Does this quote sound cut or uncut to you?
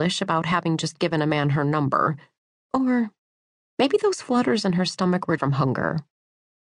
cut